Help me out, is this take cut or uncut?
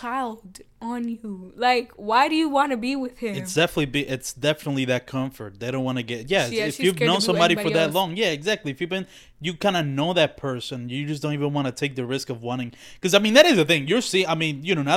uncut